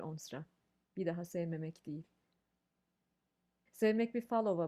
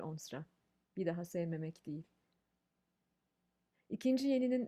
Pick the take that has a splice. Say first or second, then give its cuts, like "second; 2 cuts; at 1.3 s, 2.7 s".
first; 1 cut; at 3.7 s